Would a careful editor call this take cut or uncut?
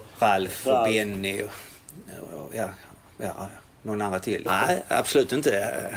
cut